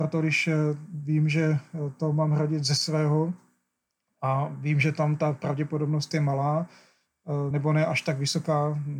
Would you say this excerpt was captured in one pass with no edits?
yes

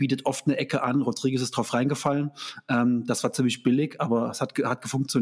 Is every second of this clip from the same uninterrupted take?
yes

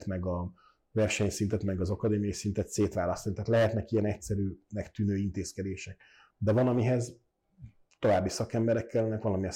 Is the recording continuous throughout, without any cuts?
yes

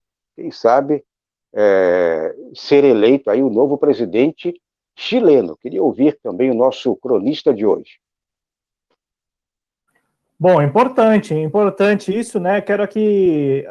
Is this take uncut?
yes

